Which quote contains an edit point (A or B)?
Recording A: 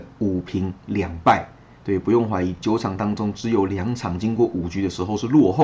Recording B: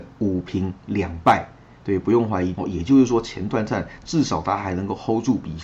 B